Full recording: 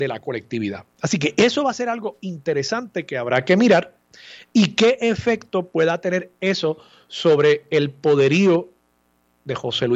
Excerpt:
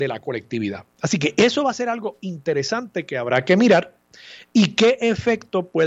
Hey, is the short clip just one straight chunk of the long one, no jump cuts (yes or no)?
yes